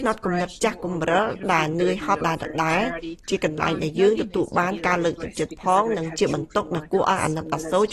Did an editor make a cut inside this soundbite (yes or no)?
yes